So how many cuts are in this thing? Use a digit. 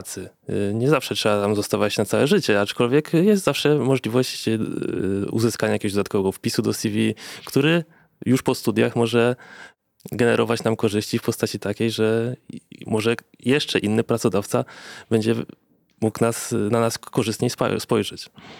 0